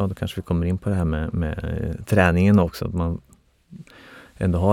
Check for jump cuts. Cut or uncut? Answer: uncut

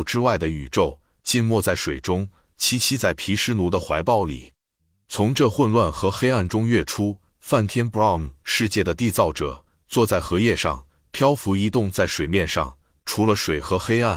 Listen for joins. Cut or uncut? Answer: uncut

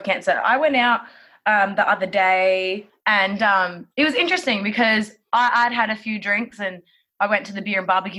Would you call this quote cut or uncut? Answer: uncut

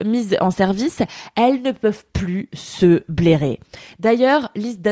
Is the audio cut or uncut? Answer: uncut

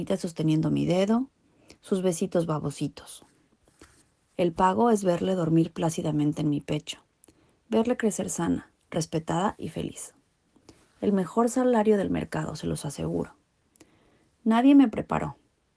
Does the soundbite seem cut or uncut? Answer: uncut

